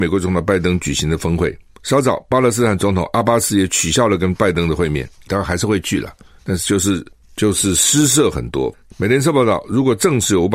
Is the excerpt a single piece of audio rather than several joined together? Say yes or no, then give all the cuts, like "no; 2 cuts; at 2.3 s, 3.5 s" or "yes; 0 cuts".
no; 2 cuts; at 5.3 s, 8.9 s